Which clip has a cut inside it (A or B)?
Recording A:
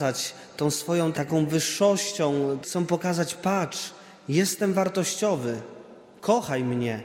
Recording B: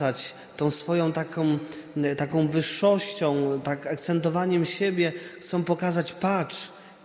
A